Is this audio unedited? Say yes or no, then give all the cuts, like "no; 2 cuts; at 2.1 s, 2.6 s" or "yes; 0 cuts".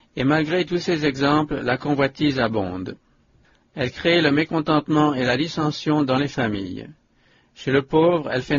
no; 1 cut; at 3.6 s